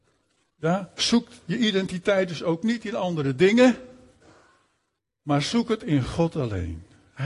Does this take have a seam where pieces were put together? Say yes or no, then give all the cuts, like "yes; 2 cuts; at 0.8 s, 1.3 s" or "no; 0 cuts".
no; 0 cuts